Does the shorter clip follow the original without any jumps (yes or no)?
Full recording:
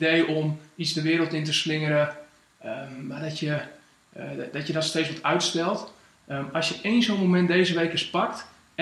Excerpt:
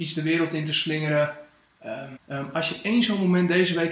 no